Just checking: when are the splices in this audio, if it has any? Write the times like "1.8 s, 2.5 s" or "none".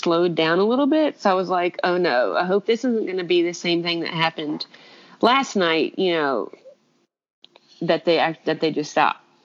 none